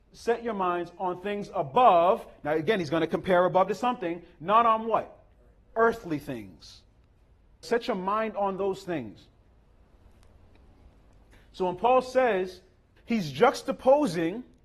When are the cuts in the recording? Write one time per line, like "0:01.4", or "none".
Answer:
0:07.6
0:13.0